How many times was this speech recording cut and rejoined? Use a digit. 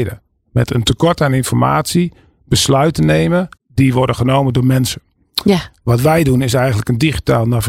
1